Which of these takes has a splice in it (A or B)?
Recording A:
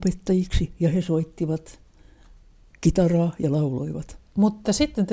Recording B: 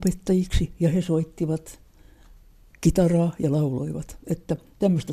A